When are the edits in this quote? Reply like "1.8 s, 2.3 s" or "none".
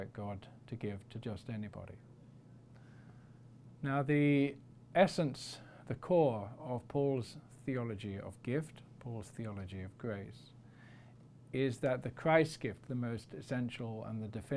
none